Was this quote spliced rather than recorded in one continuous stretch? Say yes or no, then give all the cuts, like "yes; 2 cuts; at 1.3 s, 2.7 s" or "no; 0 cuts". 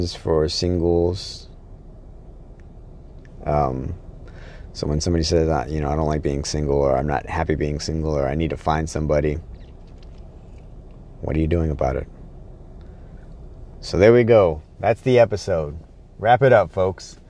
no; 0 cuts